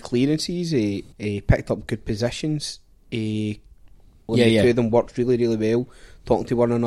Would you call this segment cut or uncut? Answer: cut